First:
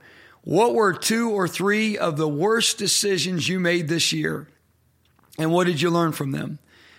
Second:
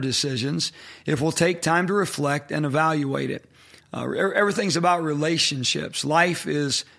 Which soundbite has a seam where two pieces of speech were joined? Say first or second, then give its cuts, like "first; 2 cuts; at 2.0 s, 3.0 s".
second; 1 cut; at 3.8 s